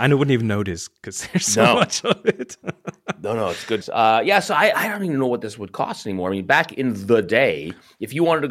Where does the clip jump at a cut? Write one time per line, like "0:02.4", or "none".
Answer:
0:03.8